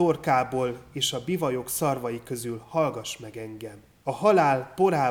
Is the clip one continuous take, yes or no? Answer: no